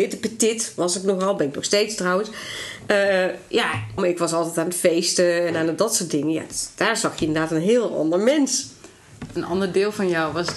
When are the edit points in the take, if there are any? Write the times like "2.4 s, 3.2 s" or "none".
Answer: 4.0 s

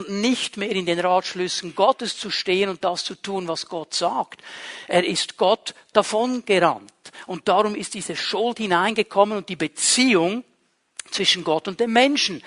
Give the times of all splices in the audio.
none

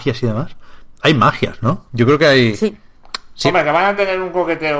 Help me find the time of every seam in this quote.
1.9 s

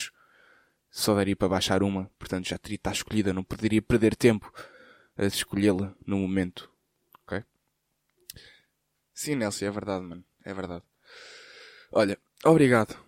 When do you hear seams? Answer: none

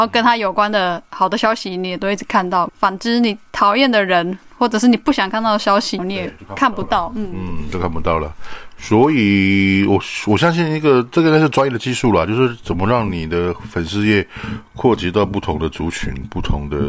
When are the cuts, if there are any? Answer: 2.7 s, 6.0 s

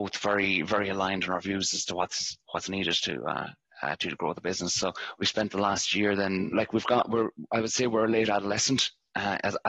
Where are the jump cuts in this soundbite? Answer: 6.5 s

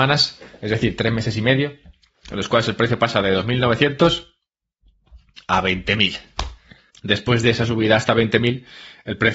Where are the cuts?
6.9 s

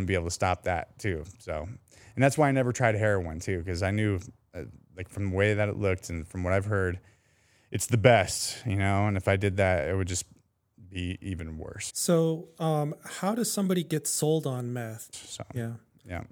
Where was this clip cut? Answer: 11.9 s, 15.1 s

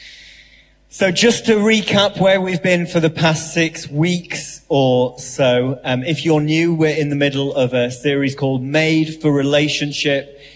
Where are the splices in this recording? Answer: none

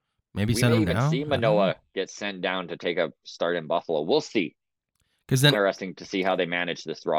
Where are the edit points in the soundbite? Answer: 5.5 s

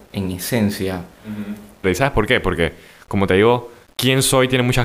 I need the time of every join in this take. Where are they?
1.8 s

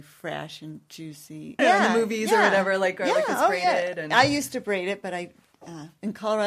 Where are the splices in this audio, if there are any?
1.6 s

